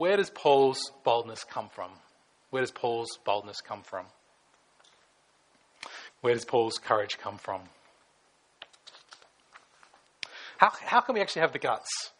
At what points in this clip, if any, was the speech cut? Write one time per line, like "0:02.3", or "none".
0:06.1
0:10.6